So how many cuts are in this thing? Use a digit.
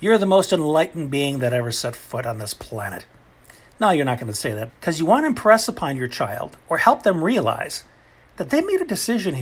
1